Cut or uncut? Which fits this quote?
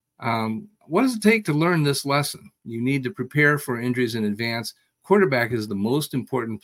uncut